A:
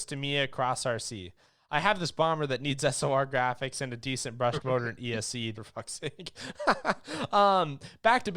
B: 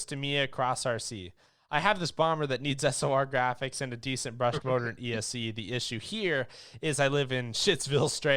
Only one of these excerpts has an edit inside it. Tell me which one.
A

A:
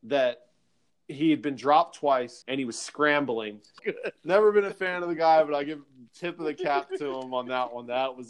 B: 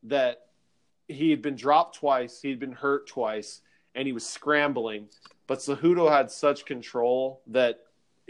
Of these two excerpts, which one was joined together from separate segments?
A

